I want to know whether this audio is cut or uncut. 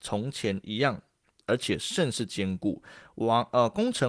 uncut